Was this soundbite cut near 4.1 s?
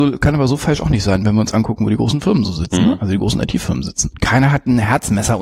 yes; 1 cut; at 4.1 s

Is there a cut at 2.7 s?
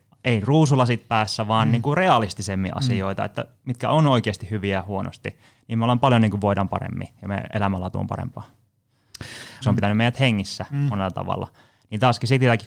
no; 1 cut; at 9.6 s

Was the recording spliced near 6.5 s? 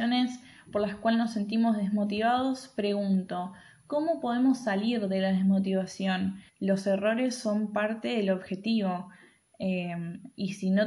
yes; 1 cut; at 6.5 s

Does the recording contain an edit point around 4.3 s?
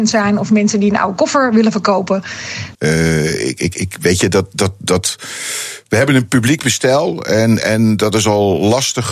no; 1 cut; at 2.7 s

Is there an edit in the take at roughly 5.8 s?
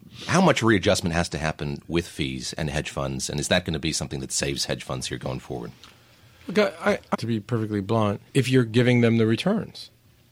no; 2 cuts; at 7.1 s, 8.3 s

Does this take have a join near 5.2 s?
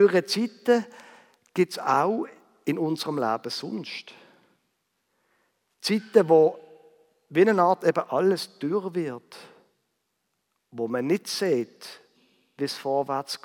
no; 0 cuts

